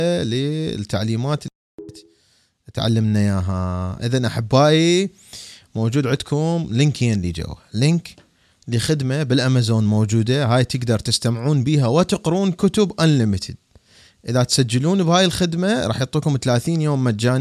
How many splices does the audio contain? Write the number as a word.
zero